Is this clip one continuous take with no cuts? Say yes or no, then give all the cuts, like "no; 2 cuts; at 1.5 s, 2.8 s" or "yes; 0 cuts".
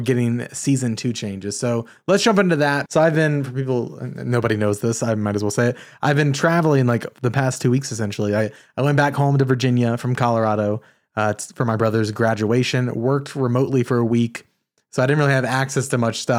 no; 1 cut; at 2.9 s